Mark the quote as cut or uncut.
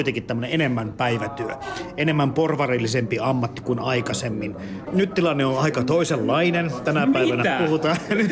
cut